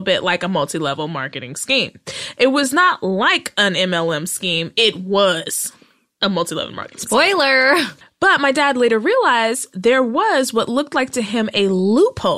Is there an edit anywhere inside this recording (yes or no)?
no